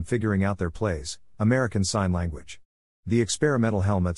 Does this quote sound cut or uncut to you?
cut